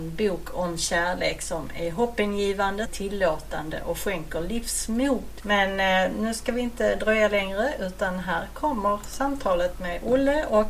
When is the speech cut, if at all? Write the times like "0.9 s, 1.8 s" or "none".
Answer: 2.9 s, 5.4 s